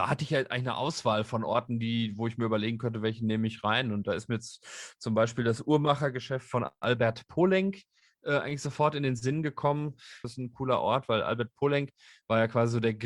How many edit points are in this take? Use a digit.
1